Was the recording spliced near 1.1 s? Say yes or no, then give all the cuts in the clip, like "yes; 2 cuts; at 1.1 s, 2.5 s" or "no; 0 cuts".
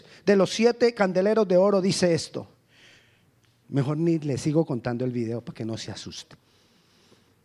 no; 1 cut; at 3.6 s